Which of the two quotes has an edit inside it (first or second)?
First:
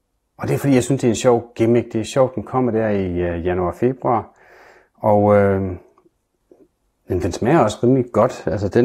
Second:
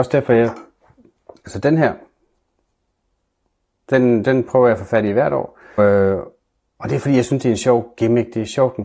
second